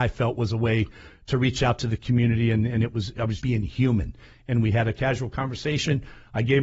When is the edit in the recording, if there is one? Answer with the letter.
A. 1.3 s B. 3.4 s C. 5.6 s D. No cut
B